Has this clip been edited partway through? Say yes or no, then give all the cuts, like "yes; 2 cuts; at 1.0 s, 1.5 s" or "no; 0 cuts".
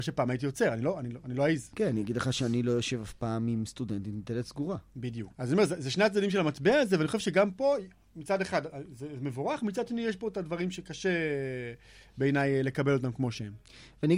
yes; 2 cuts; at 1.7 s, 5.3 s